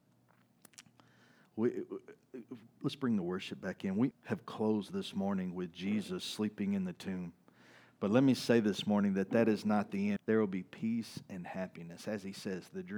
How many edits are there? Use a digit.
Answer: 2